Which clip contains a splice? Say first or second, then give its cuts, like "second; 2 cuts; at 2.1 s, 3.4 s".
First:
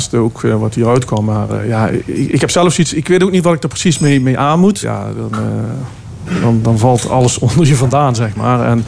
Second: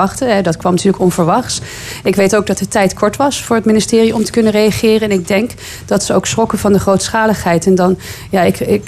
first; 1 cut; at 4.8 s